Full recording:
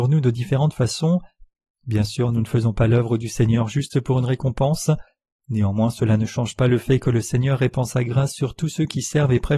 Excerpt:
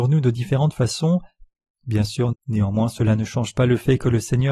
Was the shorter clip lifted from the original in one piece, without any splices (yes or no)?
no